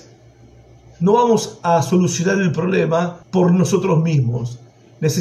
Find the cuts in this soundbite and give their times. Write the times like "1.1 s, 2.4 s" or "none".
3.2 s

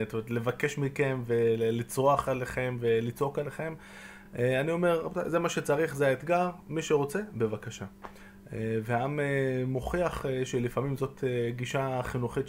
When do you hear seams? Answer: none

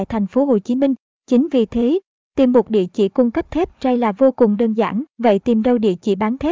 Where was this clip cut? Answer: 1.1 s, 5.1 s

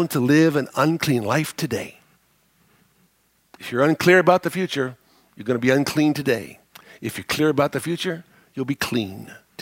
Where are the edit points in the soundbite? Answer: none

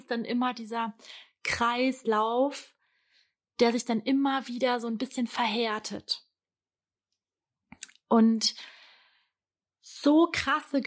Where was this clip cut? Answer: none

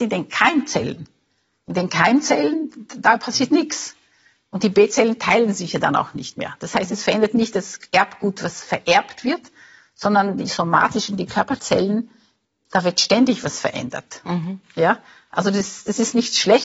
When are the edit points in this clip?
none

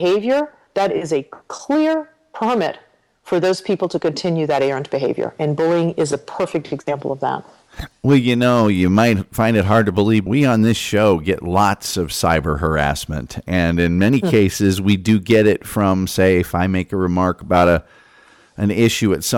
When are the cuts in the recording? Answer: 10.3 s

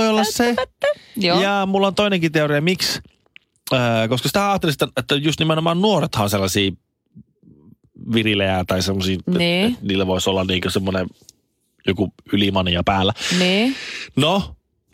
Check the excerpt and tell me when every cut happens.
none

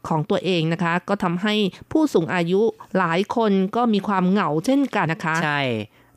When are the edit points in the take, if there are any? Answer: 5.1 s

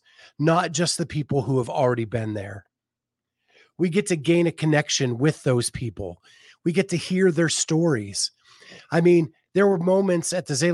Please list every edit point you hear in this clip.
none

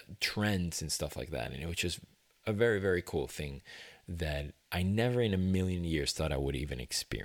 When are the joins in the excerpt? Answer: 4.6 s

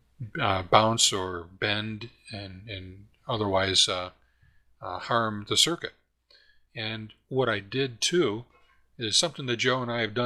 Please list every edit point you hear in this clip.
none

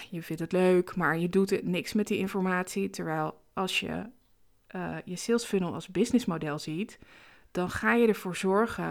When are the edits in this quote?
none

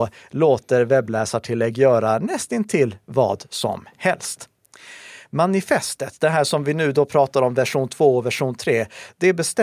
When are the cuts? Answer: none

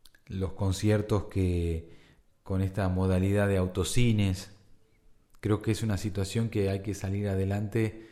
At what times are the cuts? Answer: 5.3 s

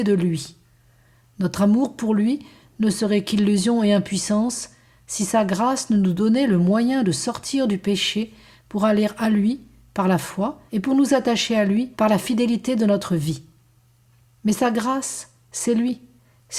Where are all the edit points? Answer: 10.7 s, 11.9 s

